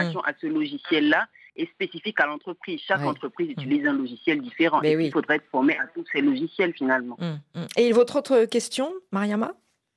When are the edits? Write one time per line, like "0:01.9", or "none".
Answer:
none